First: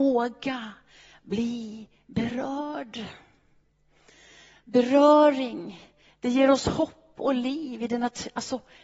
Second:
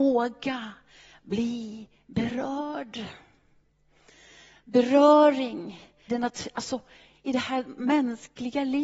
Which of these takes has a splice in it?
second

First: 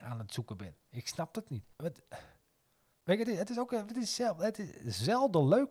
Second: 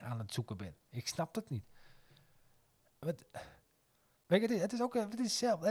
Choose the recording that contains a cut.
first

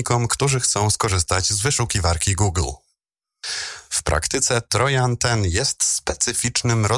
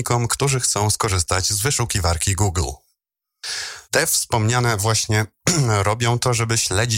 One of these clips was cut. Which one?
second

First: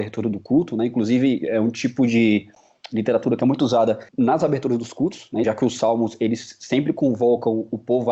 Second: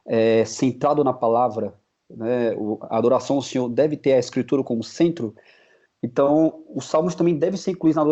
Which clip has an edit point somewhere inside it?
first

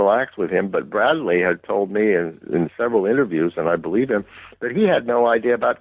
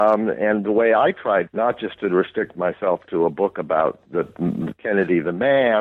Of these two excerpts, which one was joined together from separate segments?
second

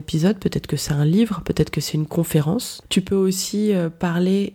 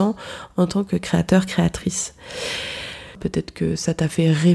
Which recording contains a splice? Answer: second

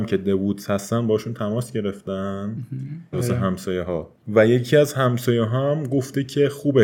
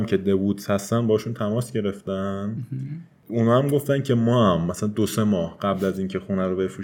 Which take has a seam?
first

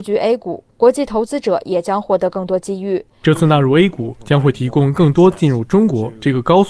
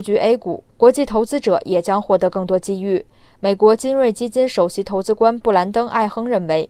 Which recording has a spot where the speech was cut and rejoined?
first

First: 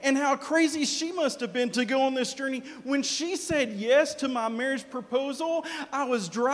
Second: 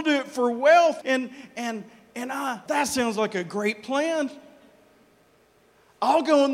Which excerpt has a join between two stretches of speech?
second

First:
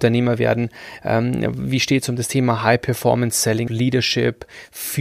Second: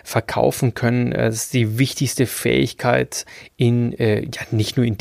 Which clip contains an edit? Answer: first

